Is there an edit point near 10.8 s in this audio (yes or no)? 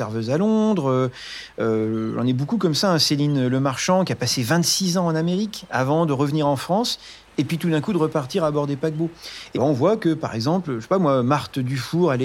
no